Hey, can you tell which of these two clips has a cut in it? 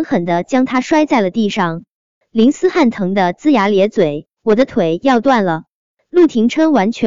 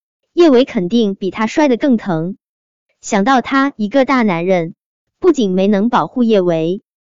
first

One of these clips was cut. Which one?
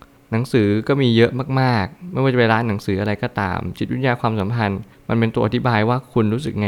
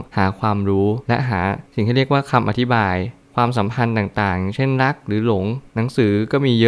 second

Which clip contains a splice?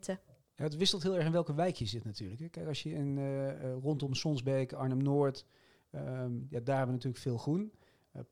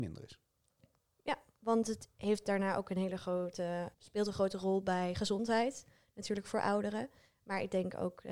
second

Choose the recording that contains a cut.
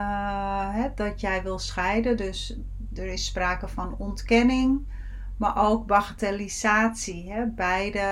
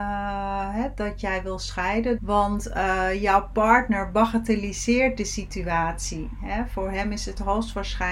second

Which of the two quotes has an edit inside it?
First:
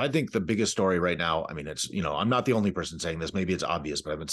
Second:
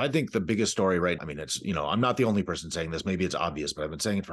second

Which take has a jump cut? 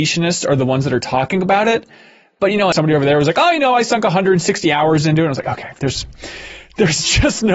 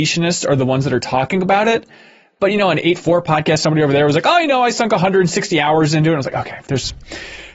first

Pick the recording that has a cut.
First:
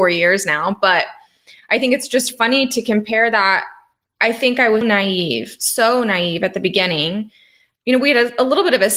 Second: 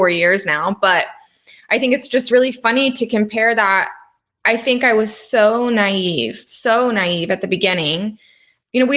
first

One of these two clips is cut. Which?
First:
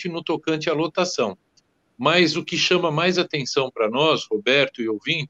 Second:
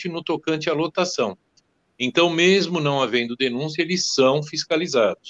first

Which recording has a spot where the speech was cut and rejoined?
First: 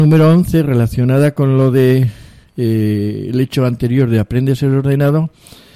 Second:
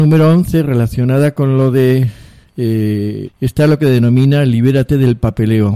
second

